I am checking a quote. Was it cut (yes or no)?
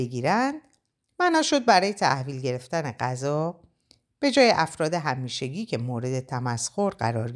no